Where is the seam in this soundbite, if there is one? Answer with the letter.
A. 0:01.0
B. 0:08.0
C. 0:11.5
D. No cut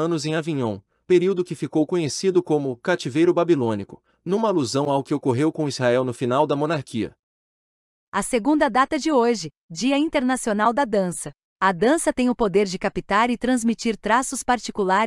A